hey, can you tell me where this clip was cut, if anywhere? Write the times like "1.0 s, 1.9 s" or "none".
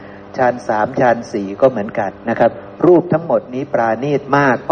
2.1 s